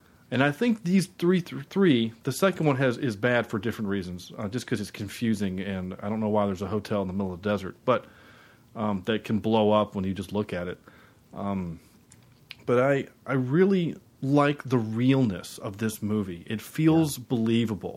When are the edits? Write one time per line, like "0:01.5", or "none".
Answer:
none